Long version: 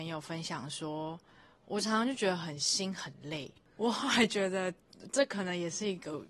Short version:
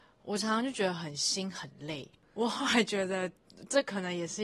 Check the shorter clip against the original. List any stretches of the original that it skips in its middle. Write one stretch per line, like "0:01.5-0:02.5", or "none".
none